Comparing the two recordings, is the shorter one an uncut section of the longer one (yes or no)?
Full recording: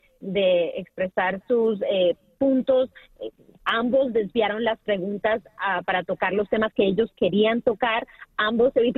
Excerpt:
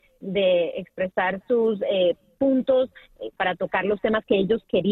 no